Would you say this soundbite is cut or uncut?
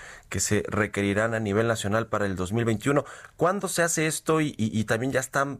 uncut